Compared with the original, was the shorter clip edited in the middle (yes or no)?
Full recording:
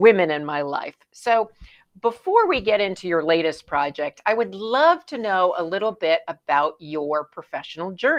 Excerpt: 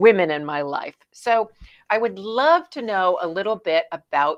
yes